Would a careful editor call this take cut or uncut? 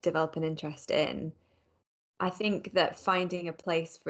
uncut